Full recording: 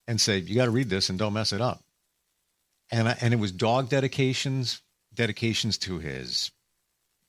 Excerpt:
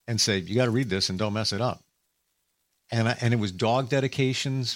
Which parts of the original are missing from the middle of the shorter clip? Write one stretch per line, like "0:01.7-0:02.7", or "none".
none